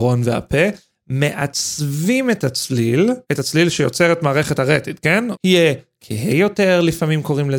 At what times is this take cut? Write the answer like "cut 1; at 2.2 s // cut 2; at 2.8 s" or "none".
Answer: cut 1; at 3.2 s // cut 2; at 5.3 s

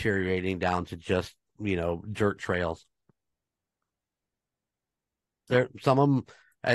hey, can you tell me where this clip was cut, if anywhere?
cut 1; at 5.5 s

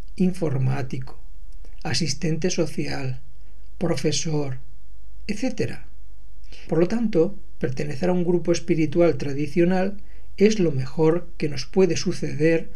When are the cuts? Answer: cut 1; at 6.7 s

